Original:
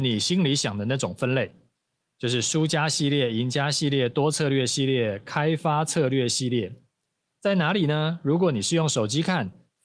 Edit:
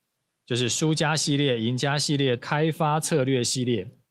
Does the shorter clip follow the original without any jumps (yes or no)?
no